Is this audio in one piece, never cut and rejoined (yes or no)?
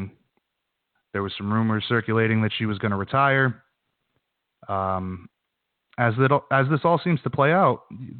no